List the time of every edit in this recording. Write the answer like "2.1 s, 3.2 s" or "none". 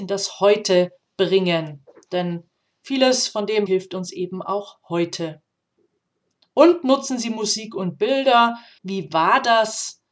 3.7 s, 8.8 s